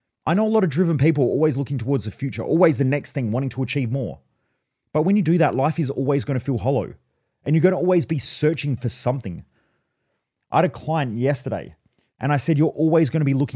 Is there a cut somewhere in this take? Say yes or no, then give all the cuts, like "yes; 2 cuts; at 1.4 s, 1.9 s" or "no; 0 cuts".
yes; 1 cut; at 12.1 s